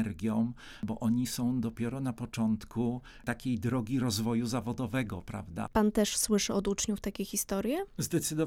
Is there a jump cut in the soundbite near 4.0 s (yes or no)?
no